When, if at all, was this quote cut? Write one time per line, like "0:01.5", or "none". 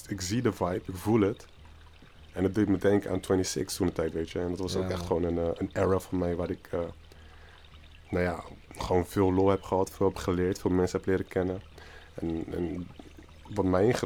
none

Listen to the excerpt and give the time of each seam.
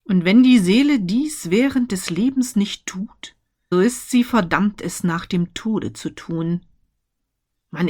0:03.7

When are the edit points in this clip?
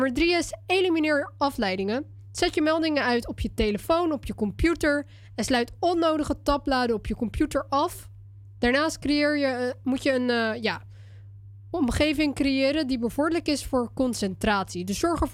none

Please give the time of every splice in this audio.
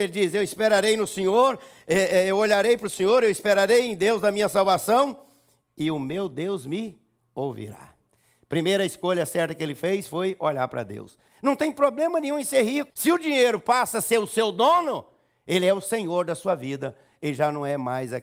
0:11.3
0:12.9

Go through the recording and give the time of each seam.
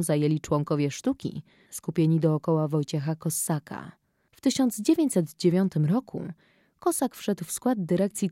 0:01.7
0:04.3

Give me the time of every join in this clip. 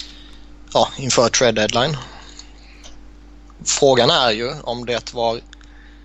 0:03.6

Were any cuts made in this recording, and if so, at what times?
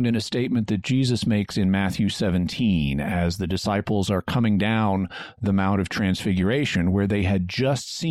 none

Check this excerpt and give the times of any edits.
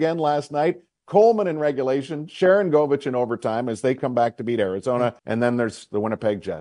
0:05.2

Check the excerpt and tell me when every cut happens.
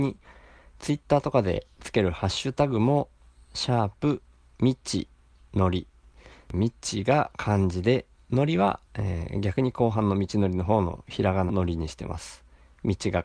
0:08.9
0:11.5

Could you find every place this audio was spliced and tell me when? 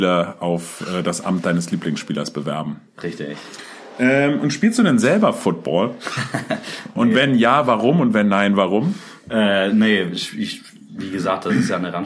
none

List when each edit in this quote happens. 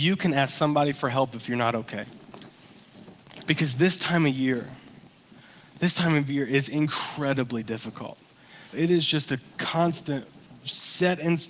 0:08.7

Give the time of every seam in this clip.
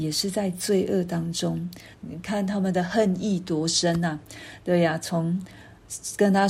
0:01.9

